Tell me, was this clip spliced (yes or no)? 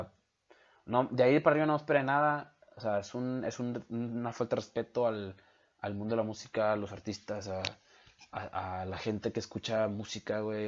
no